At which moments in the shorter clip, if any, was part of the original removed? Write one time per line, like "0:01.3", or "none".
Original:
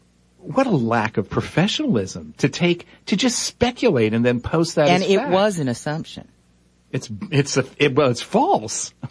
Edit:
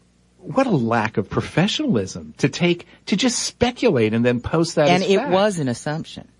none